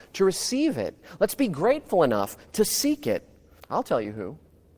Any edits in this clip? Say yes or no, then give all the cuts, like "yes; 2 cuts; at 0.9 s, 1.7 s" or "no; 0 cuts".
yes; 1 cut; at 3.6 s